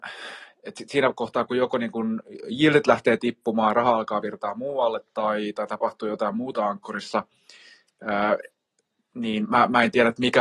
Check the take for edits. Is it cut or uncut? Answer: uncut